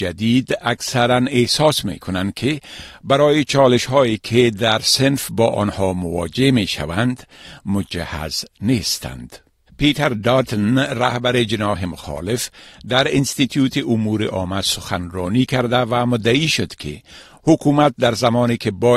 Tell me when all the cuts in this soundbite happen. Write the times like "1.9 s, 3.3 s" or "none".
9.7 s